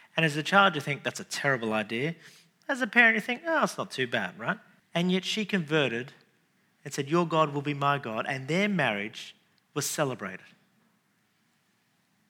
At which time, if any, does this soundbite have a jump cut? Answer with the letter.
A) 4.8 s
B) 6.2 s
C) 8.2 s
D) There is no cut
A